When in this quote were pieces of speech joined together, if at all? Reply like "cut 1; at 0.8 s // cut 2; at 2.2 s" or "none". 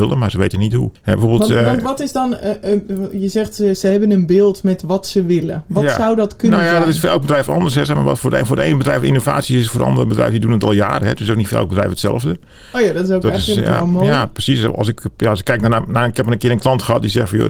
none